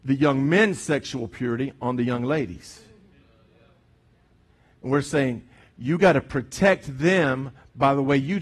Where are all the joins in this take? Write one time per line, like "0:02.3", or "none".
none